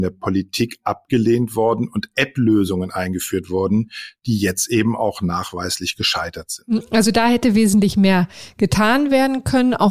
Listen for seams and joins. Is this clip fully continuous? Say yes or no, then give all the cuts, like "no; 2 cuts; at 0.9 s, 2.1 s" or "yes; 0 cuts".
yes; 0 cuts